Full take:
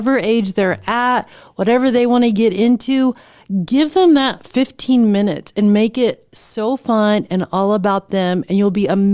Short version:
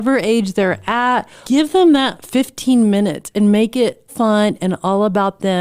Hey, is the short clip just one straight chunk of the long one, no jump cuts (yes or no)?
no